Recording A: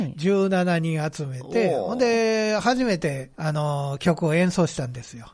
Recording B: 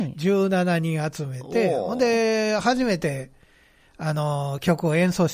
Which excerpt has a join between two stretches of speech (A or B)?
A